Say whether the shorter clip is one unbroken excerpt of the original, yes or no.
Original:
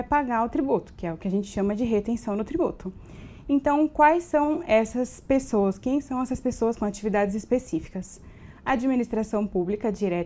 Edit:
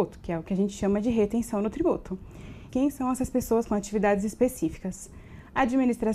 no